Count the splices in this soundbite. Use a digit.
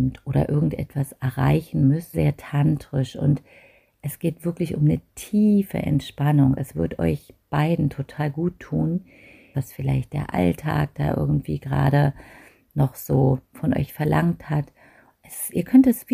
2